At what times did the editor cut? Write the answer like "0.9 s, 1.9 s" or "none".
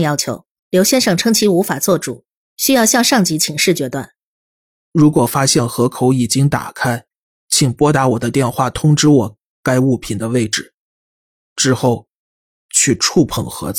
4.8 s

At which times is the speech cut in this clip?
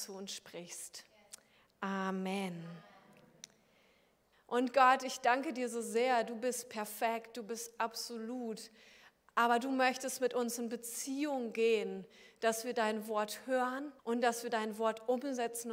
4.3 s, 14.0 s

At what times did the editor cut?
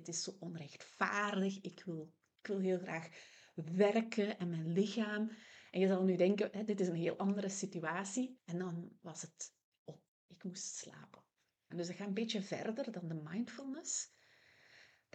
8.4 s, 11.7 s

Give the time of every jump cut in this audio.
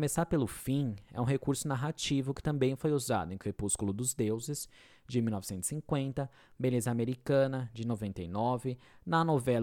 none

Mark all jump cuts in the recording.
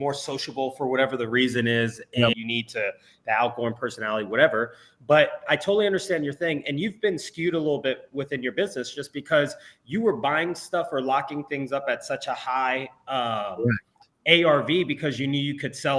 2.3 s

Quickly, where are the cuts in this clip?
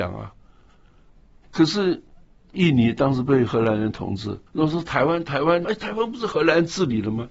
4.5 s, 5.6 s

